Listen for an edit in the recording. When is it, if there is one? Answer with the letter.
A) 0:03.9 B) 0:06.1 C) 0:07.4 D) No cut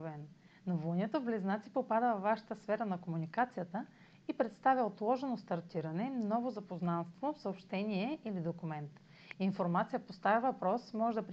D